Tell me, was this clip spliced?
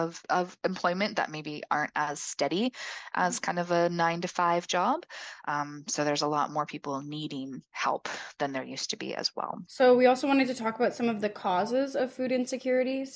no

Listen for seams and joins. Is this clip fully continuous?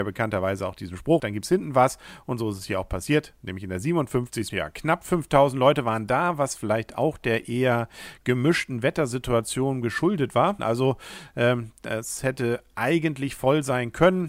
no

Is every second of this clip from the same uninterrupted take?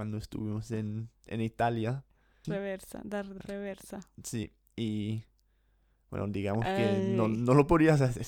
no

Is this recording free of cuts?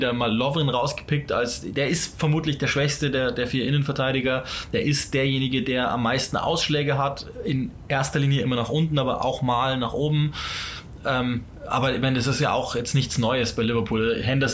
yes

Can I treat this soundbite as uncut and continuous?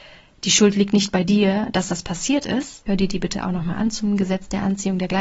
no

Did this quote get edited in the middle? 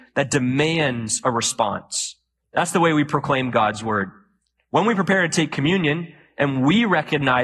no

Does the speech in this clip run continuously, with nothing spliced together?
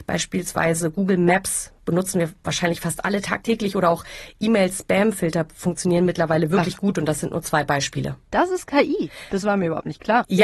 yes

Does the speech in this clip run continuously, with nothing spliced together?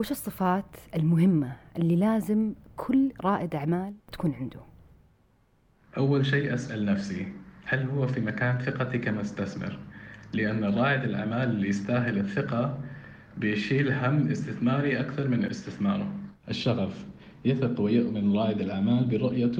no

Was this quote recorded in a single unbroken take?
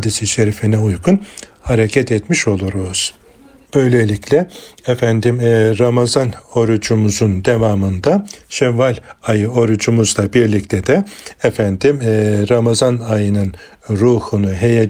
yes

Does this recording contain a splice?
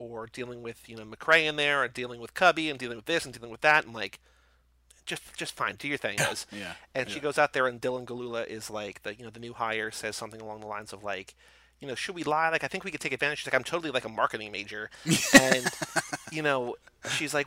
yes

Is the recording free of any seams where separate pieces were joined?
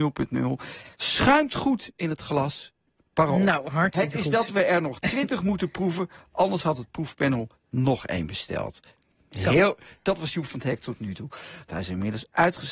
no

